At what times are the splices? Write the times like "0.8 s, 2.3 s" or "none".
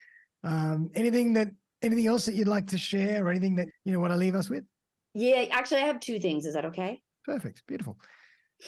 3.7 s, 7.1 s